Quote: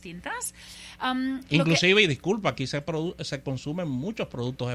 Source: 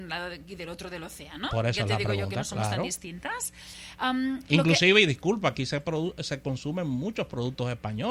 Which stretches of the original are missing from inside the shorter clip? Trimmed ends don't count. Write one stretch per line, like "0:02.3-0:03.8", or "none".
none